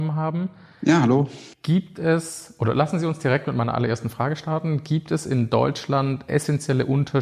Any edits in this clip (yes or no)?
yes